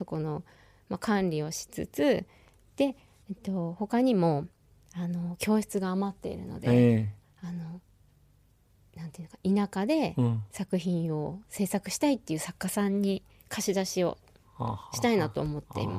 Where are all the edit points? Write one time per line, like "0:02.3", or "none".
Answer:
none